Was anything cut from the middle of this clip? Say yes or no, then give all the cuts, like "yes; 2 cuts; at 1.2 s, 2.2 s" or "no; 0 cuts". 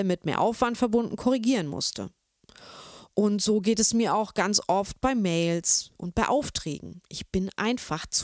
no; 0 cuts